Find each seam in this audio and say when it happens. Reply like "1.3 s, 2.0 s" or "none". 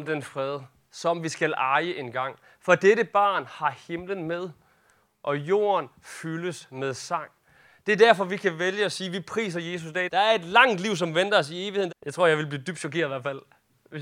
10.1 s, 11.9 s